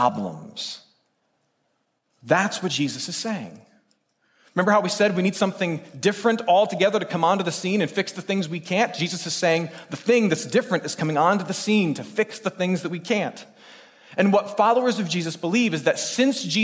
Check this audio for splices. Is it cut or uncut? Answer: uncut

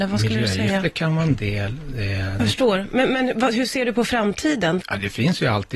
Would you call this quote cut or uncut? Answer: cut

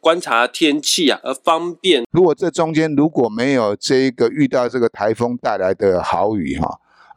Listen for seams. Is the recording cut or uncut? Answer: cut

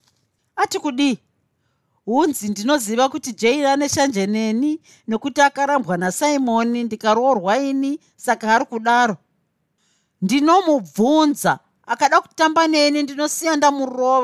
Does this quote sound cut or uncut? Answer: uncut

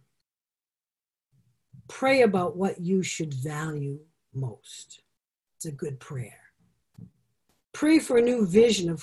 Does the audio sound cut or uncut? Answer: uncut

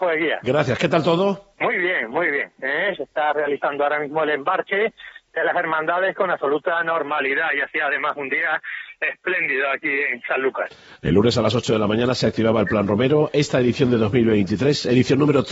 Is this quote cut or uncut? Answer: cut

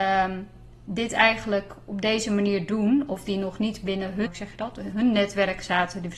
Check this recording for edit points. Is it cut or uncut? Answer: cut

